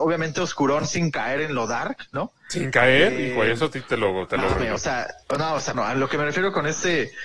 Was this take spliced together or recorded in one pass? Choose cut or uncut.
cut